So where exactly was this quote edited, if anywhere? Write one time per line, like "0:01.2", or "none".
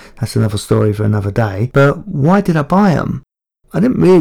none

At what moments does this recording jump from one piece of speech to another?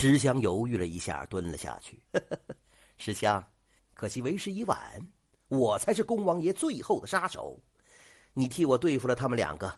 0:02.1
0:03.8

